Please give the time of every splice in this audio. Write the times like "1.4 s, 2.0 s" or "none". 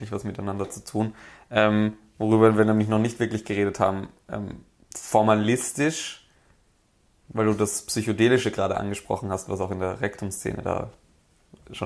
none